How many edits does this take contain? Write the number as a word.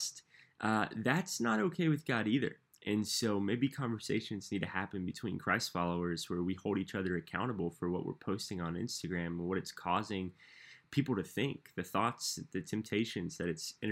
zero